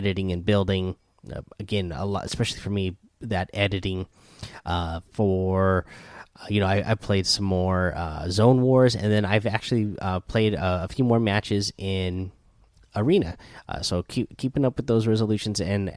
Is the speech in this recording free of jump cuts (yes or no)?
yes